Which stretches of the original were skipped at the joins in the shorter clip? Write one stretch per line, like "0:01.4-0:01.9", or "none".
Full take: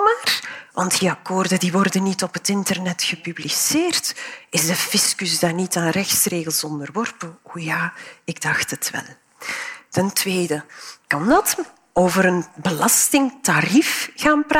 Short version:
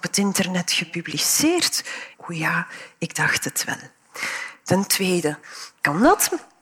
0:04.5-0:07.4